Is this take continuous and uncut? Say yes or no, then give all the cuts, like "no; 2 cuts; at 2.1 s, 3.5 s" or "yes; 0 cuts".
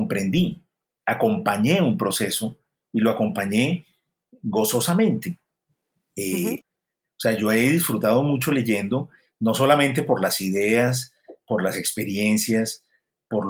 no; 1 cut; at 6.6 s